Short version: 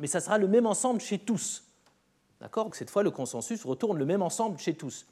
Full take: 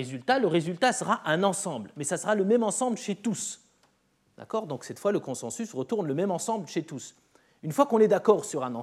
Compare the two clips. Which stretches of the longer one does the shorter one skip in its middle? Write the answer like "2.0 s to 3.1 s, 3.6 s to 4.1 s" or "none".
4.7 s to 4.8 s